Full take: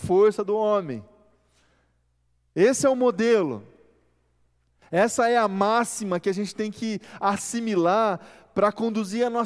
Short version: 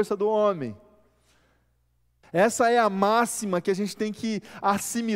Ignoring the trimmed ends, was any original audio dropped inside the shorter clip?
yes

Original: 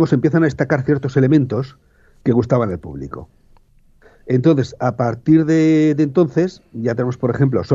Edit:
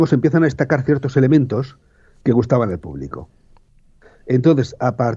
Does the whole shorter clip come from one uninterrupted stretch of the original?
yes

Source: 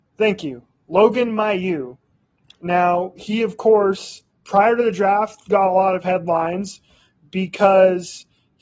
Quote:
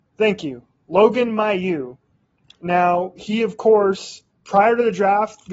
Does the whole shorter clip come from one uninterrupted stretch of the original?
yes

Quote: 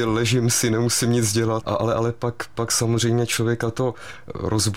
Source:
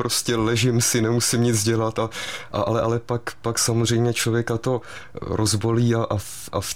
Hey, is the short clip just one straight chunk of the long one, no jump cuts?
no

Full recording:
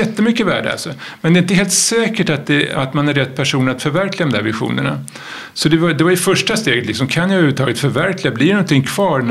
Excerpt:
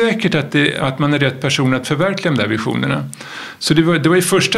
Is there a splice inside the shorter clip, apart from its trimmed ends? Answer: no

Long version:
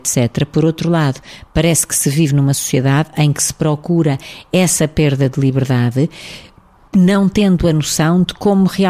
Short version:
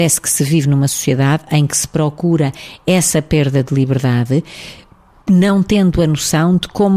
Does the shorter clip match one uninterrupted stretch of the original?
yes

